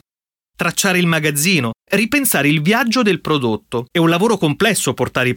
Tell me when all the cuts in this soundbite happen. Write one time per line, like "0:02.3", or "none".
0:01.8
0:03.9